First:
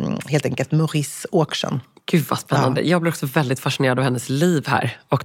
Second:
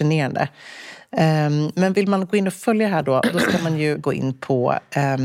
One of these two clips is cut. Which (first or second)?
second